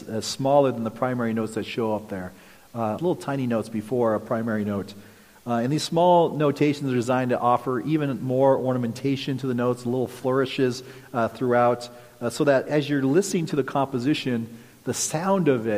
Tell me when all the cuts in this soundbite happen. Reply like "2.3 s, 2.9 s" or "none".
3.0 s